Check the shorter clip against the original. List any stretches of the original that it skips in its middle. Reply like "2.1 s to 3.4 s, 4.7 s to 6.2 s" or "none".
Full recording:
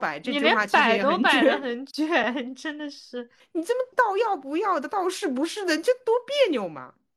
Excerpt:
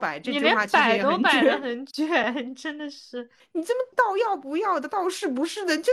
none